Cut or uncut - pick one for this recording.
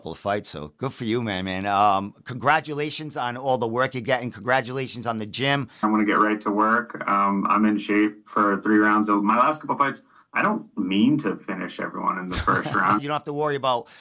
cut